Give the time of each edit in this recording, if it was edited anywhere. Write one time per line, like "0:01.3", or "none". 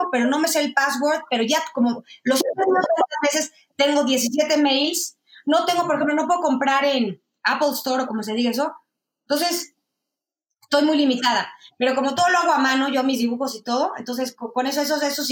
none